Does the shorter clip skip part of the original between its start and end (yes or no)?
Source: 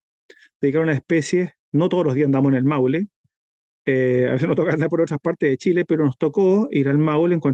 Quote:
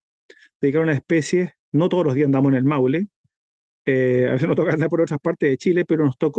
no